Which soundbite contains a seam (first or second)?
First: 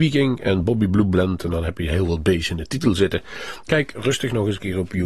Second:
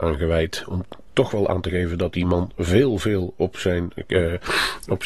first